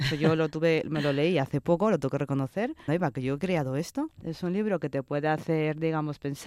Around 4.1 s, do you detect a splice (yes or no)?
yes